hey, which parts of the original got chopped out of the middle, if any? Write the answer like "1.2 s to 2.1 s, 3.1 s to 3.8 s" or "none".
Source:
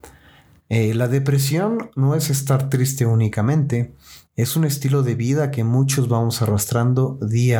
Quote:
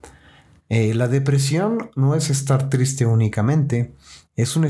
none